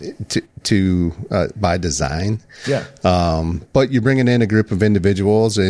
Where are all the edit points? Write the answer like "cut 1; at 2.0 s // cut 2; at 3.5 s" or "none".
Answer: none